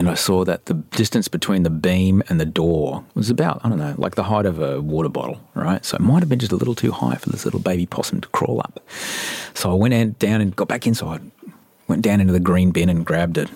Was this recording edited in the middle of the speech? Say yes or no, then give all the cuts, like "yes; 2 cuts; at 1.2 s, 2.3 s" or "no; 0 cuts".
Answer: no; 0 cuts